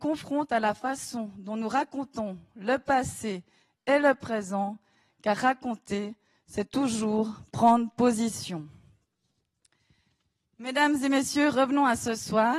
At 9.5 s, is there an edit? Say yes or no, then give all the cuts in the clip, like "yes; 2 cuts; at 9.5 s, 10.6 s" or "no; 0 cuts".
no; 0 cuts